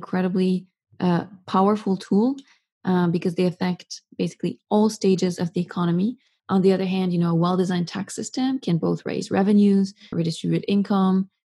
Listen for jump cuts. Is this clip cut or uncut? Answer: cut